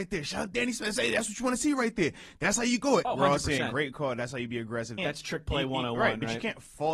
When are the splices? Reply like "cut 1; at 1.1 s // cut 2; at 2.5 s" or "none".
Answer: cut 1; at 3.0 s // cut 2; at 5.0 s